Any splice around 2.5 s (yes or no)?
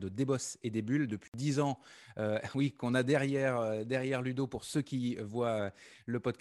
no